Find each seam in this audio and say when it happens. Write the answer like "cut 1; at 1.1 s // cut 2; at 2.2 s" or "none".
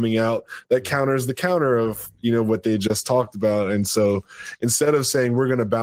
none